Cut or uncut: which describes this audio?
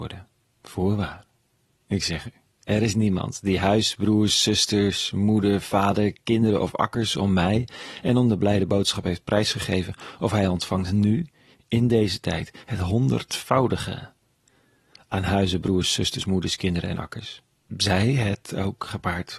uncut